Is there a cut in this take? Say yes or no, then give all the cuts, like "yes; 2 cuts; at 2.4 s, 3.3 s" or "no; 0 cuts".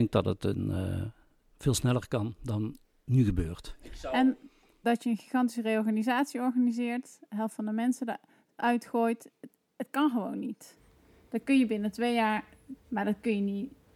yes; 2 cuts; at 4.8 s, 12.8 s